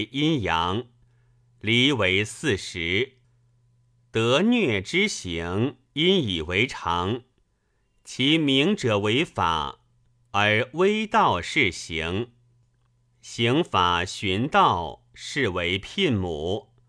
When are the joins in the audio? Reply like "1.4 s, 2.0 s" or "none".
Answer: none